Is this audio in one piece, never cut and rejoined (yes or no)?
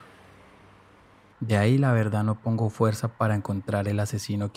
no